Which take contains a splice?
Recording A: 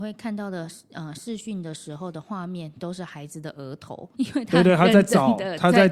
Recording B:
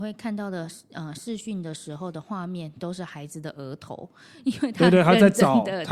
A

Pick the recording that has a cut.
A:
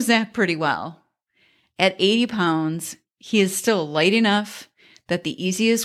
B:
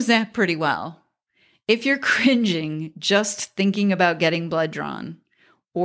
B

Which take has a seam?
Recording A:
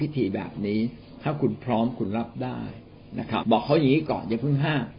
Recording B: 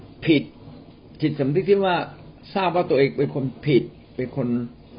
A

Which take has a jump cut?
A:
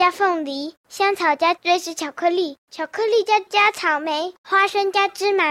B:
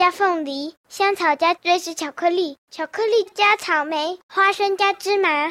B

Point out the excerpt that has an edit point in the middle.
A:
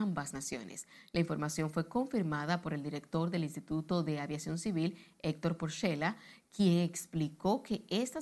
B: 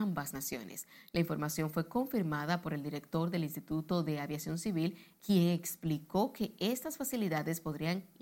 B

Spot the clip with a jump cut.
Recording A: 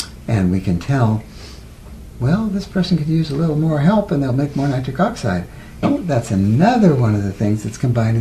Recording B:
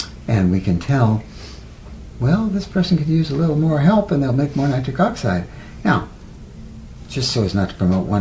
A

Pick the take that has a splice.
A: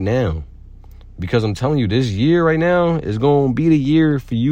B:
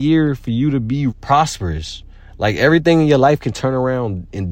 B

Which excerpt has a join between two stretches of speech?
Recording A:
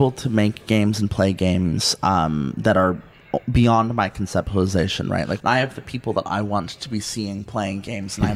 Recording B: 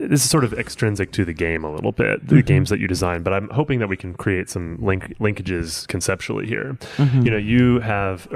A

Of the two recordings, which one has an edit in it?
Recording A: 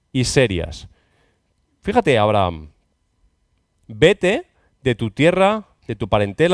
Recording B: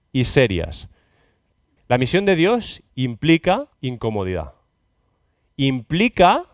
B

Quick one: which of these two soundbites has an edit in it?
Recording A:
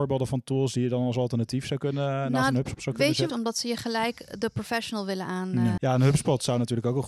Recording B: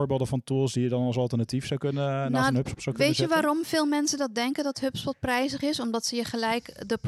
A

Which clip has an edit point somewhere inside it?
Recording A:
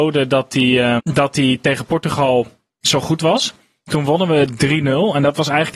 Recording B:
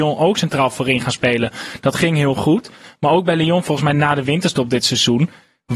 A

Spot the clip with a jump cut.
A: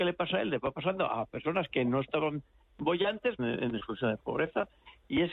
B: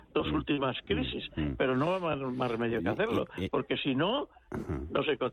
A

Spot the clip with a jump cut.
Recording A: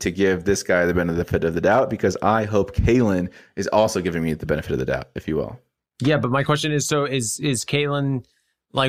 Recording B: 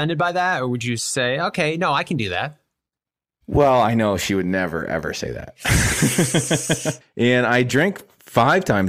B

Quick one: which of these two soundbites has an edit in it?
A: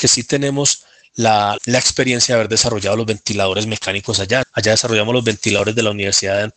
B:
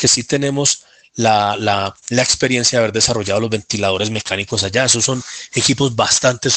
A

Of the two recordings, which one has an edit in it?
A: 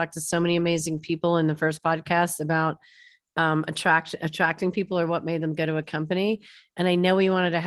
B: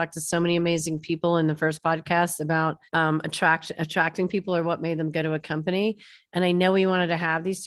B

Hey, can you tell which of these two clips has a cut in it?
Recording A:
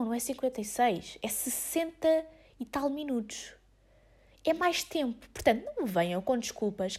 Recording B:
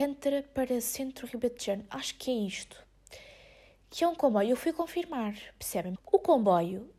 B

